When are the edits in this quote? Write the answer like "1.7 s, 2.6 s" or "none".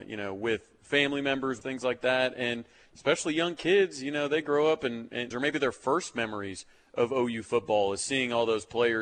1.6 s, 5.3 s